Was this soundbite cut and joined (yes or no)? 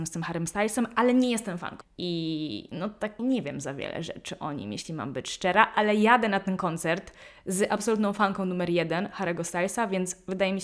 yes